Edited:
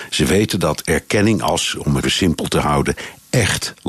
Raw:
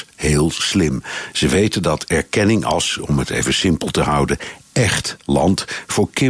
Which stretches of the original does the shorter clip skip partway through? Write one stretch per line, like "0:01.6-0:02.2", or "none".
0:03.3-0:03.5